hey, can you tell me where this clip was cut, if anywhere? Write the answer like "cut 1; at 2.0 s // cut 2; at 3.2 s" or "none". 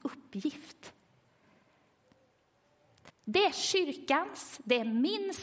cut 1; at 3.1 s